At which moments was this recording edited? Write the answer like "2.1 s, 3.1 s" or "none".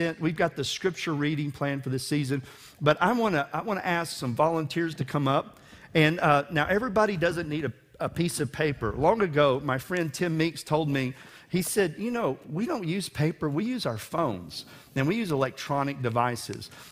none